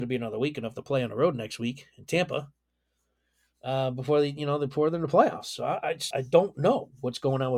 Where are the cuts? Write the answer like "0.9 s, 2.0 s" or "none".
6.1 s

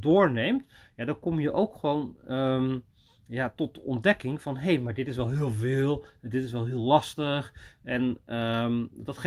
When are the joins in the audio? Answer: none

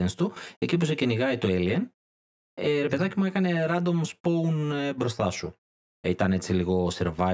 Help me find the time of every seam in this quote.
5.8 s

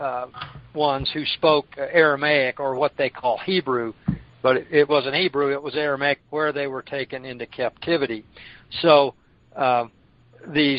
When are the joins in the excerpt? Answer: 4.9 s, 6.2 s

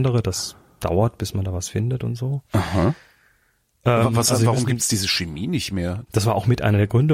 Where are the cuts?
6.1 s

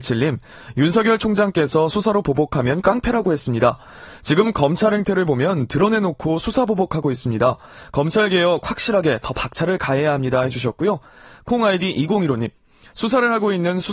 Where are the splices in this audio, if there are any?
none

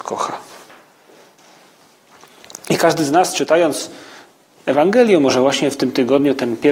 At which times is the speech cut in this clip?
none

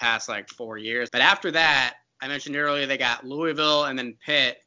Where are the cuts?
1.1 s

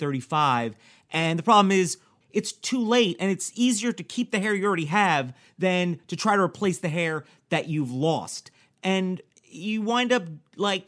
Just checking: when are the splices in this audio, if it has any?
2.2 s

